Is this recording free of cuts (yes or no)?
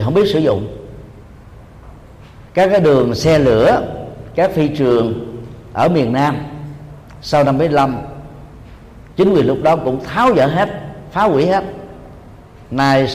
no